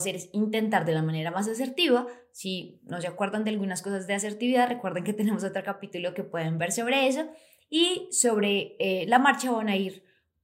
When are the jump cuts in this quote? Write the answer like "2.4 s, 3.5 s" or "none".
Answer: none